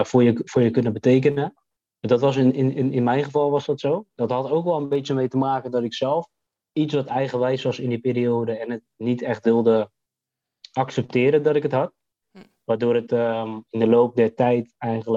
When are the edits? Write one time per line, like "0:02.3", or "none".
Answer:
0:13.7